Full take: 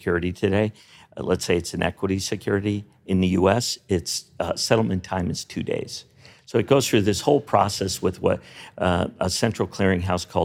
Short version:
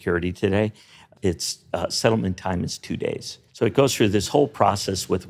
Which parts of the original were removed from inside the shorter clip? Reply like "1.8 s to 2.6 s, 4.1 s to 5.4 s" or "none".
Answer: 1.2 s to 3.8 s, 6.1 s to 6.4 s